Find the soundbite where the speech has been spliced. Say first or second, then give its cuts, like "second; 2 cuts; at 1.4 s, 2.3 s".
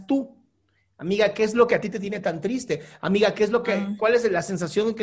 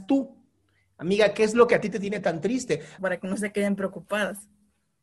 second; 1 cut; at 3.0 s